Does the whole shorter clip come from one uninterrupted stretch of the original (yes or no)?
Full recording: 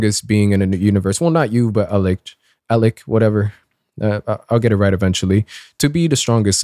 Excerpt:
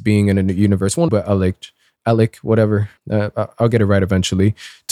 no